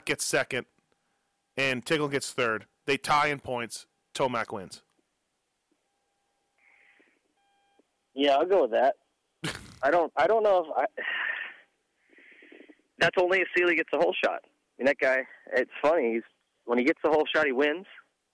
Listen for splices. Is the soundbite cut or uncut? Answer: uncut